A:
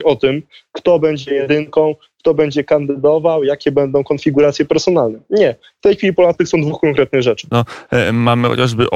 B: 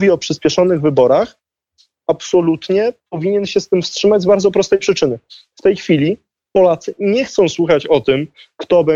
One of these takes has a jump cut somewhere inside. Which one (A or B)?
A